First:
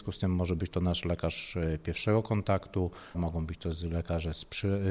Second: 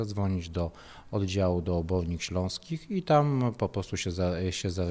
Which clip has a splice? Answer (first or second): first